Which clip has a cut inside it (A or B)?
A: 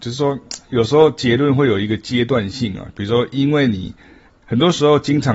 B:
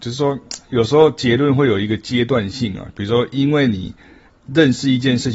A